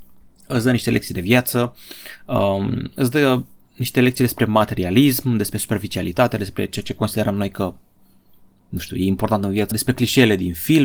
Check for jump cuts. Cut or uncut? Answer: cut